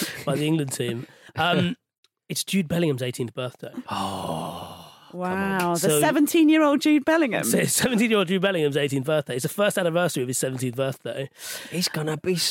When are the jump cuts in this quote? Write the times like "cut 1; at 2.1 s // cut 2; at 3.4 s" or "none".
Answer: none